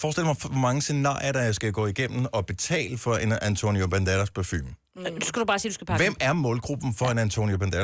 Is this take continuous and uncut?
yes; 0 cuts

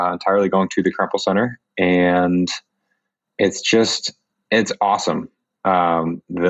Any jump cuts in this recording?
no; 0 cuts

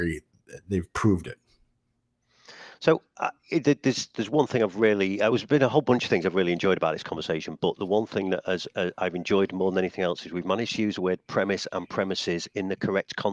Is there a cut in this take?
no; 0 cuts

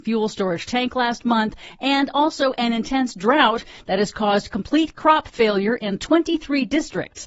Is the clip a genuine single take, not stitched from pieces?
yes; 0 cuts

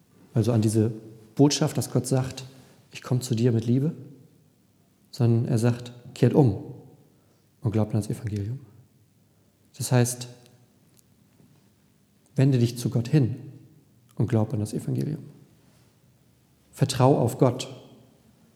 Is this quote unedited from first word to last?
yes; 0 cuts

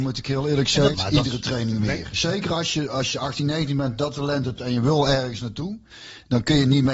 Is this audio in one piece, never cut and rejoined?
no; 1 cut; at 0.9 s

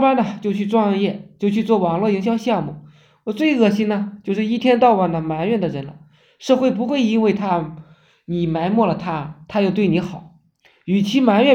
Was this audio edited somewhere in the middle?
no; 0 cuts

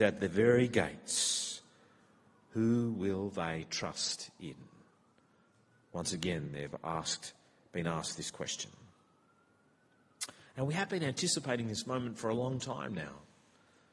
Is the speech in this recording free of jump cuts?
yes; 0 cuts

